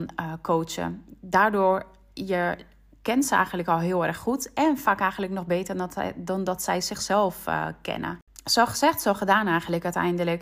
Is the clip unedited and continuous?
yes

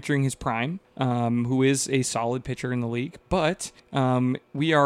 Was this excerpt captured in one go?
yes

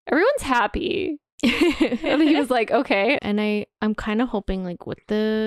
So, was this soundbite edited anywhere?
yes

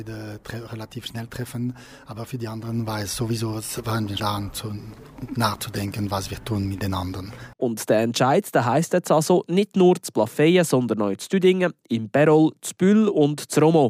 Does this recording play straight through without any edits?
no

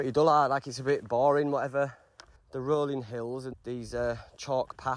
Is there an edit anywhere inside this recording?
yes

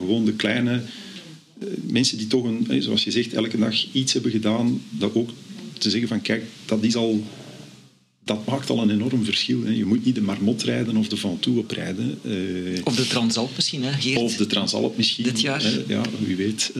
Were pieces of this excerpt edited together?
no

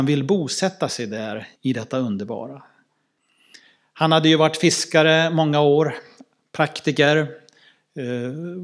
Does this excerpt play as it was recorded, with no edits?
no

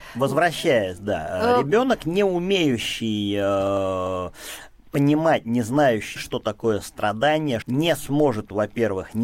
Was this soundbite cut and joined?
yes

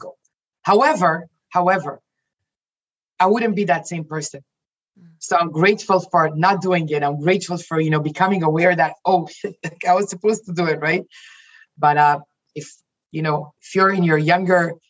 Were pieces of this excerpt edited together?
no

